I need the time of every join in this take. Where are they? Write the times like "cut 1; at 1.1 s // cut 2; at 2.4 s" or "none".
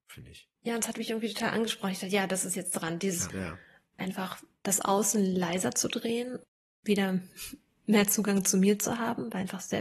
cut 1; at 3.3 s